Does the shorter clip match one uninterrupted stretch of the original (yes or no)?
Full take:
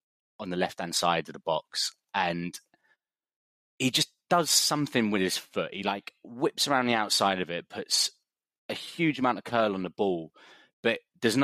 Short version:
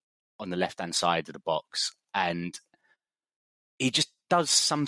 yes